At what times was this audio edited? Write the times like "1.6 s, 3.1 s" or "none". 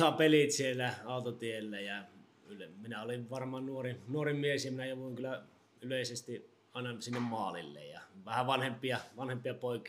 none